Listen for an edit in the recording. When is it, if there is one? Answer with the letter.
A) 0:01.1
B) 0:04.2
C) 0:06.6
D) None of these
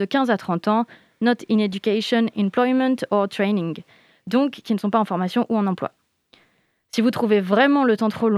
D